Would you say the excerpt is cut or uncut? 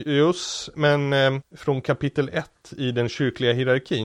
cut